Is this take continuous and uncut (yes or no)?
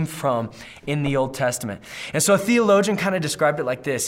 yes